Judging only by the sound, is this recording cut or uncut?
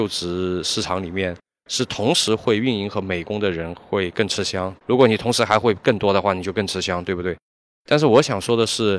cut